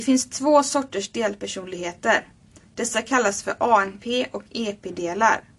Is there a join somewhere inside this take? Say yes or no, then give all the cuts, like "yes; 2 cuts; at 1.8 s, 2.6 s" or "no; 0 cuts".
no; 0 cuts